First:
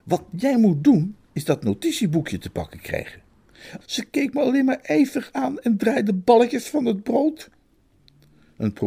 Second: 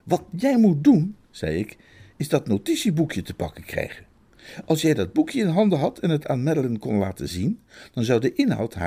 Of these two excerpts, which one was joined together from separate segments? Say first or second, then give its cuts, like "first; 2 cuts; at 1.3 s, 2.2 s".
first; 2 cuts; at 1.3 s, 3.8 s